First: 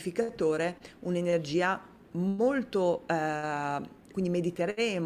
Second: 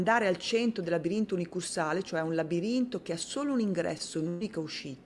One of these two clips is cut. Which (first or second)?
first